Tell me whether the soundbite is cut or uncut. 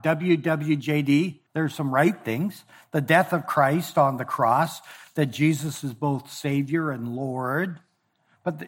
cut